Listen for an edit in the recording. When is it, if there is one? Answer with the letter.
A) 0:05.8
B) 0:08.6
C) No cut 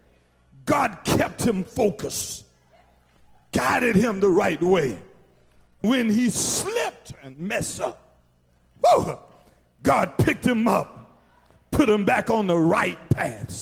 A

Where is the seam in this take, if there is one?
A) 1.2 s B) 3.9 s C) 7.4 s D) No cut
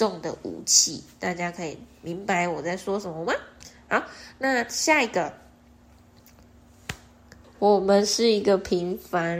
C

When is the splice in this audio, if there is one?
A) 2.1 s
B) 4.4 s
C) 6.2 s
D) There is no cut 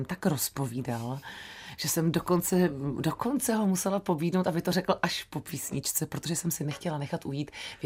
D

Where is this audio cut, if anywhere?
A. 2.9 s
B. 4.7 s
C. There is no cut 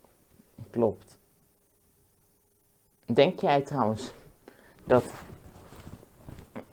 C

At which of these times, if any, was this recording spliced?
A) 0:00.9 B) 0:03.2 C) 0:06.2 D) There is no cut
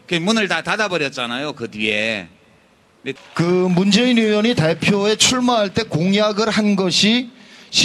B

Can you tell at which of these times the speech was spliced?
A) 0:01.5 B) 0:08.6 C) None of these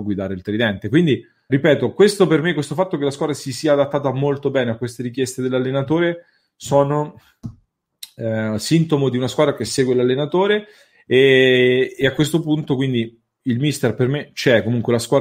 A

